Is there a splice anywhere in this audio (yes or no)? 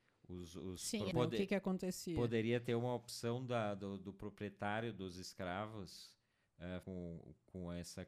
yes